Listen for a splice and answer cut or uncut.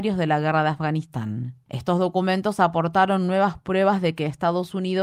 uncut